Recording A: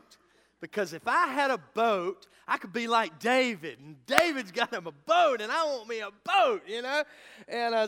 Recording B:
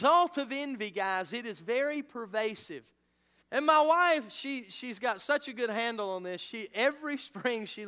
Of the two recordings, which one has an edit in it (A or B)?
B